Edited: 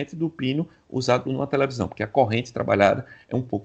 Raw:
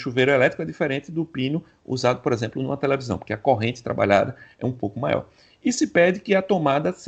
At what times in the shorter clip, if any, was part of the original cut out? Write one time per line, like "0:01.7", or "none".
0:01.3